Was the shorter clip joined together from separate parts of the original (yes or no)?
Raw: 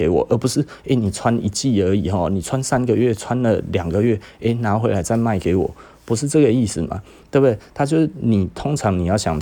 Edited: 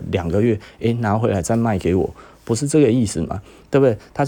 no